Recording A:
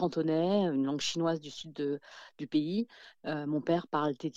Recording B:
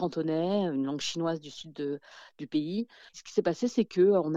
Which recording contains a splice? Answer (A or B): B